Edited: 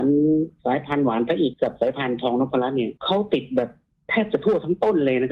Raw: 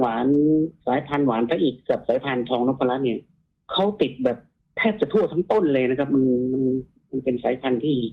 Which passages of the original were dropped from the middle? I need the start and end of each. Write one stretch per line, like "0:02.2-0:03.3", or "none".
0:01.7-0:01.8
0:03.2-0:03.6

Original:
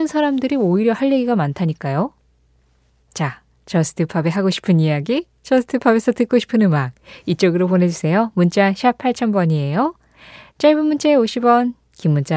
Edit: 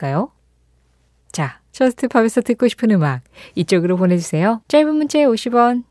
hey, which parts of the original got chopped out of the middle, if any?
0:03.5-0:05.4
0:08.3-0:10.5

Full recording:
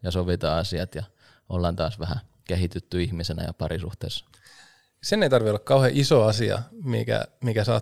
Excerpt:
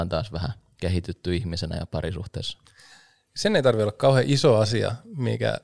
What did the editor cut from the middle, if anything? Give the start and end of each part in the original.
none

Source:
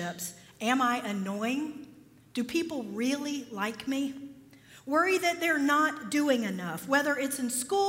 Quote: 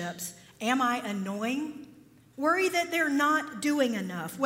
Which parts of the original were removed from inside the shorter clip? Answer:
0:02.3-0:04.8

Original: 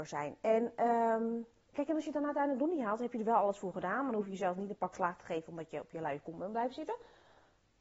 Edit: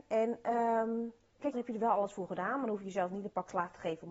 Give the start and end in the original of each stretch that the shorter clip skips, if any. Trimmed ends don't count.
0:01.9-0:03.0

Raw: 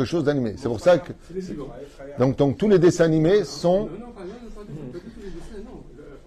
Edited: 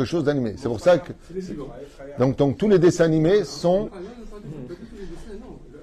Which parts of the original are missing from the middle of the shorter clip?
0:03.9-0:04.1

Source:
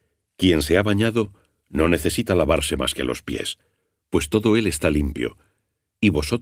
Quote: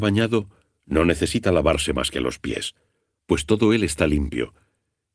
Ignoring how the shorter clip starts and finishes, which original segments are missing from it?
none

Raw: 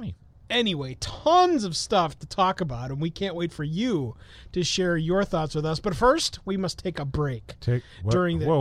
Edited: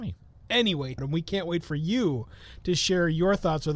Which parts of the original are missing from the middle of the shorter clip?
0:01.0-0:02.9

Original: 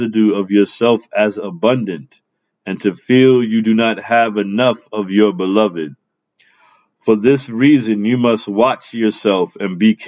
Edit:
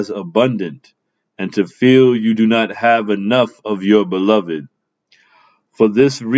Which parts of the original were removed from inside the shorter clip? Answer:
none

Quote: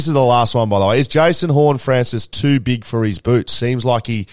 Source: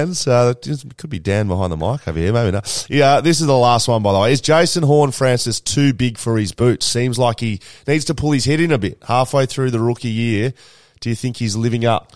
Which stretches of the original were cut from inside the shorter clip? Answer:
none

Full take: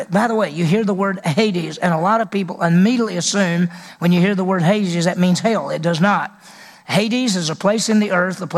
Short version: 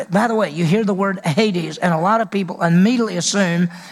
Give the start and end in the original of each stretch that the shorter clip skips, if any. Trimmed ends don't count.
none

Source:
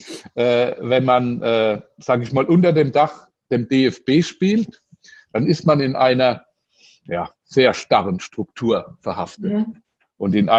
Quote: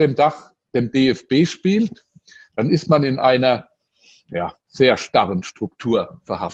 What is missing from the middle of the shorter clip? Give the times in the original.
none

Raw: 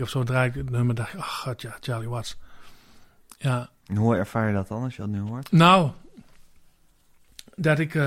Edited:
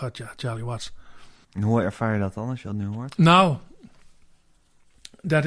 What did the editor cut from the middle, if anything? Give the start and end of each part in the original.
0:02.9-0:03.8

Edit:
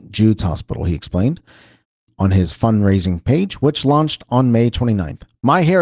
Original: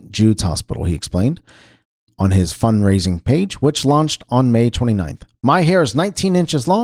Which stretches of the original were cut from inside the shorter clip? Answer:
none

